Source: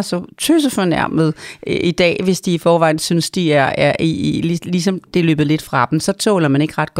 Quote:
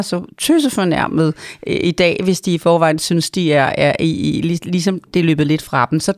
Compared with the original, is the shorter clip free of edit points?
yes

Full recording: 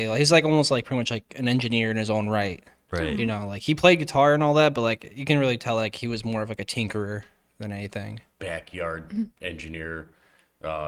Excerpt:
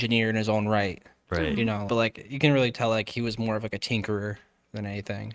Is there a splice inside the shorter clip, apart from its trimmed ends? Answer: yes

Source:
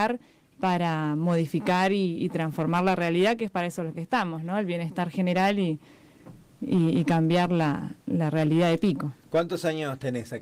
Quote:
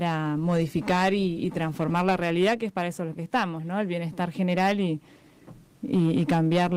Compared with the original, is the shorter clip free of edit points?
yes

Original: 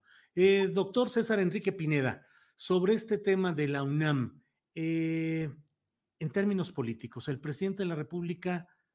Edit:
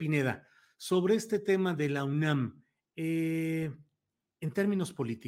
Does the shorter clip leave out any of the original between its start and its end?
no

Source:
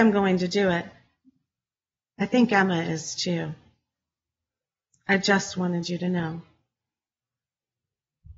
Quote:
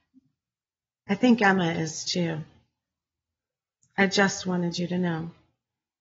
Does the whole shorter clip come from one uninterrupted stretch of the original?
yes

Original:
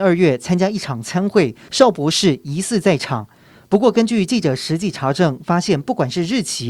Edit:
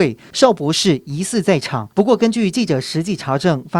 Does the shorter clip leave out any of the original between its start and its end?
yes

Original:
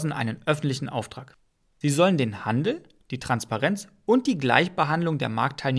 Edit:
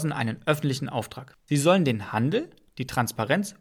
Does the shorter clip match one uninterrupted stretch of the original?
no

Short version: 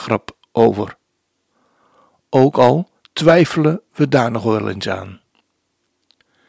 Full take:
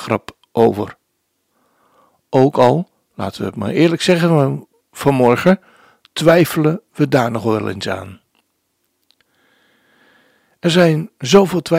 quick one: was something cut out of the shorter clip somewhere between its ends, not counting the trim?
yes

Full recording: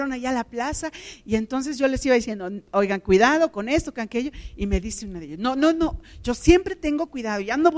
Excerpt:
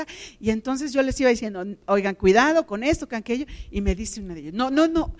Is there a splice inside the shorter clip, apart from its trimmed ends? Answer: no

